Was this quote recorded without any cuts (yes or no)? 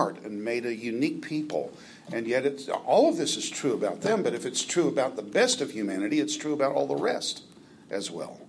yes